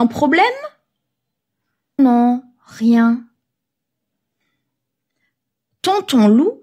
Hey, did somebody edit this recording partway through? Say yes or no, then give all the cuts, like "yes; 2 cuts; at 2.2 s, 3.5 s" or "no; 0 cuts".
yes; 1 cut; at 2.0 s